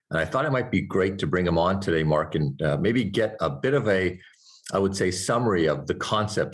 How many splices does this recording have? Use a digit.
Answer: 0